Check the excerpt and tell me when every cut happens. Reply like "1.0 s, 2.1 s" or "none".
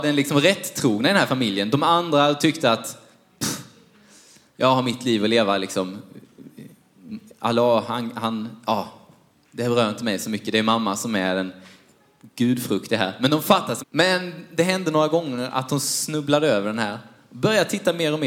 13.8 s